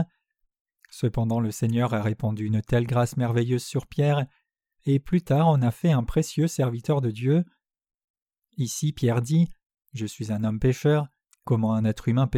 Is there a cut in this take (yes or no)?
yes